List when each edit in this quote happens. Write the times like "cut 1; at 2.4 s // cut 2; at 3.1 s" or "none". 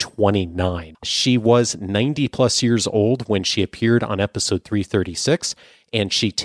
cut 1; at 0.9 s